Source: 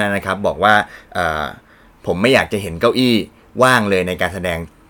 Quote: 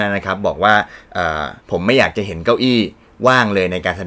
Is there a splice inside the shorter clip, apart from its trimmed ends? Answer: yes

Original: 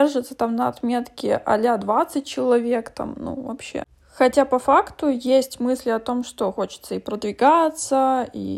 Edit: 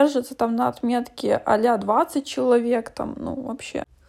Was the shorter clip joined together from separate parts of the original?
no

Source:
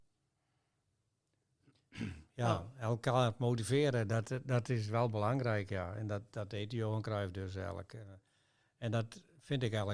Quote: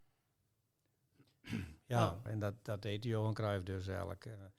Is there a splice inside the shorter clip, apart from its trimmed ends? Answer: yes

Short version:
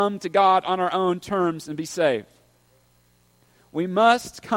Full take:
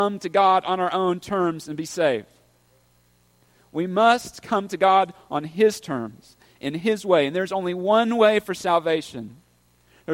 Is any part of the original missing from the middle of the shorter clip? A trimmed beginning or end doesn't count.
no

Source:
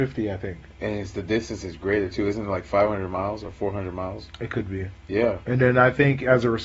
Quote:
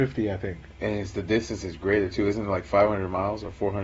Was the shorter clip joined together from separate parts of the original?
no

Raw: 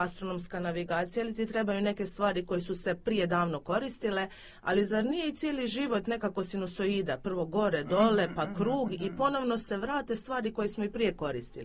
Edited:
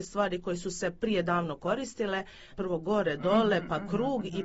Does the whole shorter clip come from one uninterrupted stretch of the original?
no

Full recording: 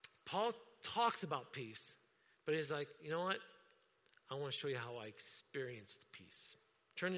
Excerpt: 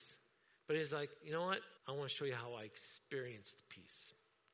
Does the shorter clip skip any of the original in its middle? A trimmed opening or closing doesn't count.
yes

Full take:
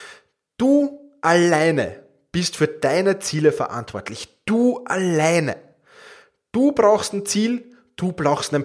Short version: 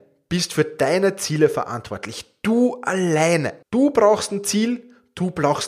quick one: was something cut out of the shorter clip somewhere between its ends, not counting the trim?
yes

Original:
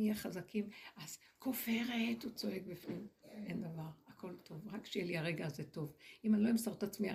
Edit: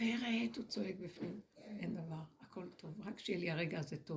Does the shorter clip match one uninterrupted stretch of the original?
yes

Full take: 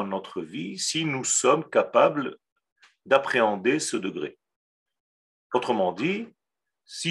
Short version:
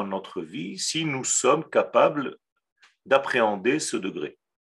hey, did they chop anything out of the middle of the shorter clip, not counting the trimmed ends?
no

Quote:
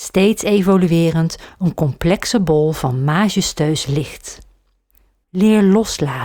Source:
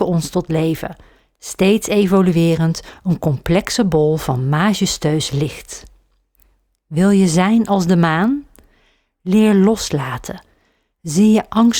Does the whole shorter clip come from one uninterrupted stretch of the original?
no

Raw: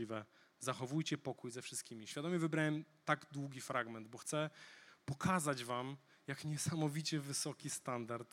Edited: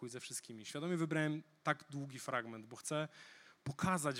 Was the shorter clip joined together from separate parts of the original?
no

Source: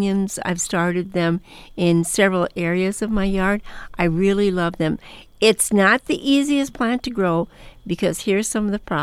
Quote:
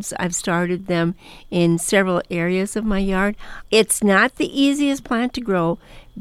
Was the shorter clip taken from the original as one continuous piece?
no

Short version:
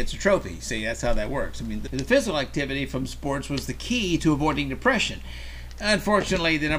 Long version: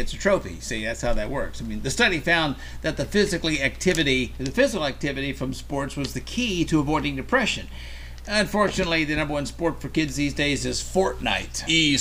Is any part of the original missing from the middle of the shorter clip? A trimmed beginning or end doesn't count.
yes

